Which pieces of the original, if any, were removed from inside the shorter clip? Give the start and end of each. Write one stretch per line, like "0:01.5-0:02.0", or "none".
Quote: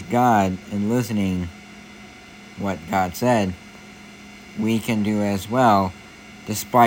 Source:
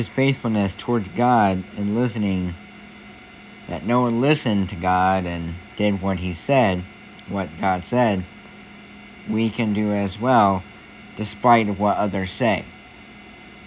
0:03.6-0:07.2